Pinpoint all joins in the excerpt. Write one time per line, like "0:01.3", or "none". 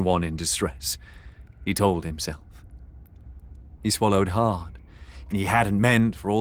0:03.8
0:05.3